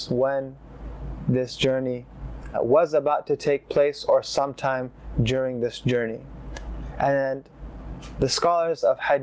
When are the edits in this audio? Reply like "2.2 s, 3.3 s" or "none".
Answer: 2.5 s